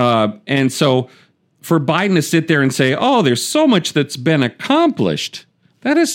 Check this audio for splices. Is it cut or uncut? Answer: uncut